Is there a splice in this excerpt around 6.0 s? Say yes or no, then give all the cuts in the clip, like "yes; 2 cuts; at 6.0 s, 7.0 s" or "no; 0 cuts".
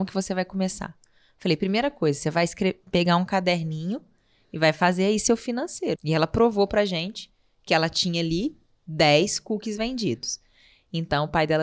yes; 1 cut; at 6.0 s